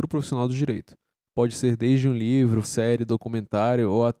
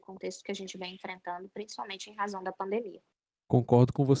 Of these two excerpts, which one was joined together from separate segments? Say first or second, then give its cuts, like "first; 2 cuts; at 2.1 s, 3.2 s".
first; 1 cut; at 2.6 s